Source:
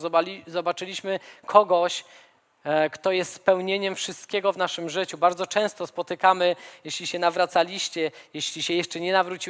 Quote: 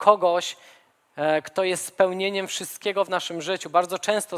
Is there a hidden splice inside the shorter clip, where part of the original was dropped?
no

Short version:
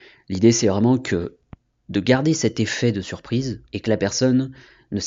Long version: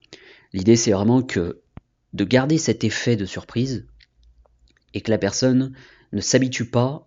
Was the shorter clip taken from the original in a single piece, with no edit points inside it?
no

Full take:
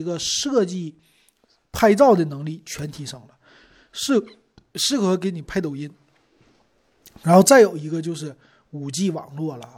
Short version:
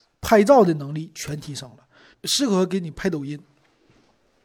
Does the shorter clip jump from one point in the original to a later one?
yes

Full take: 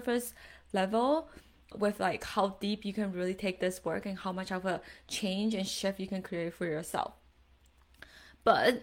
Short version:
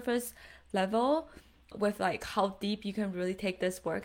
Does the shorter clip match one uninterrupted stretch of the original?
yes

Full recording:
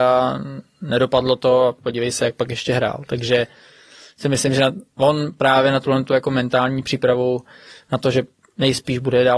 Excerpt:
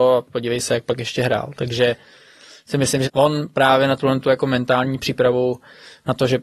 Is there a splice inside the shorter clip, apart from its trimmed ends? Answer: yes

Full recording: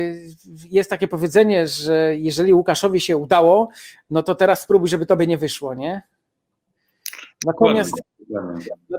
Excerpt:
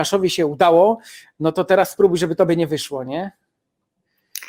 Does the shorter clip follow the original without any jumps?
yes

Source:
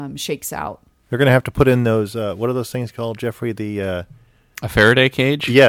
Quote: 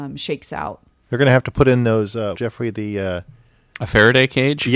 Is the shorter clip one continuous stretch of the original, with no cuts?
no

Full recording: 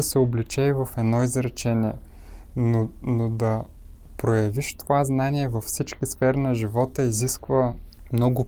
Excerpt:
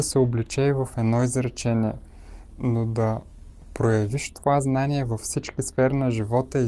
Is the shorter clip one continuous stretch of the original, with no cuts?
no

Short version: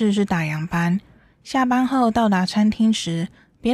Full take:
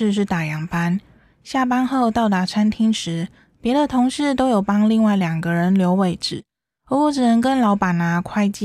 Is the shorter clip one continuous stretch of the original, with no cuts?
yes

